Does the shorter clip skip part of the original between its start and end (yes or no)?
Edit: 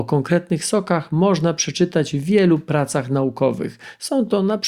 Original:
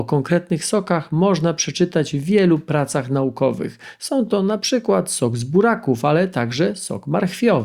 no